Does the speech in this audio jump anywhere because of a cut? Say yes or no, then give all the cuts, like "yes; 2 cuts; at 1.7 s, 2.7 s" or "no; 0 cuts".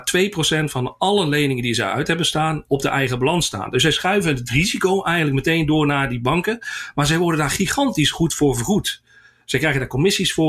no; 0 cuts